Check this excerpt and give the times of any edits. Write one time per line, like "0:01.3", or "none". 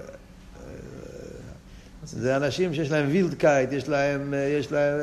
none

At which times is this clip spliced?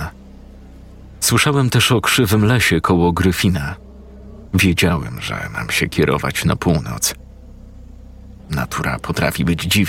0:04.5
0:08.4

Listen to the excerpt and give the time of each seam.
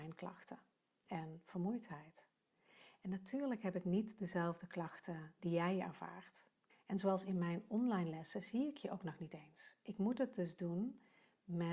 0:06.7

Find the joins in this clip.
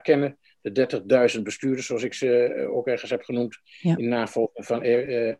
none

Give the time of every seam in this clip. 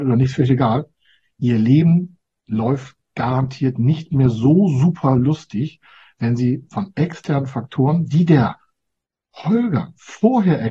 none

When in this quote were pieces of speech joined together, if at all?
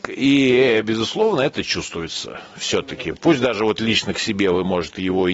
none

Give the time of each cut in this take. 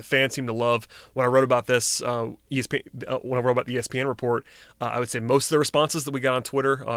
none

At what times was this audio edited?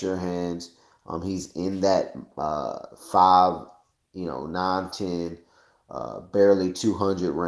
0:04.9

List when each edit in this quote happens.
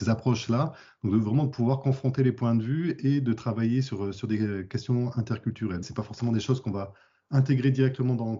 0:05.8

